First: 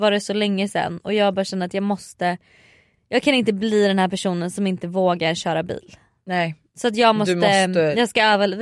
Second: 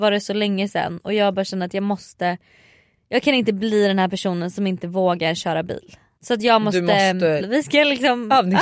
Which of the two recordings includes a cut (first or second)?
second